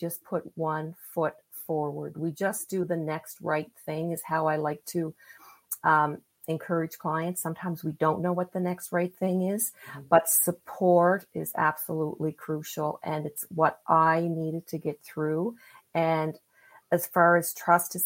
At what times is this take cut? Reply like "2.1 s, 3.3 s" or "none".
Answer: none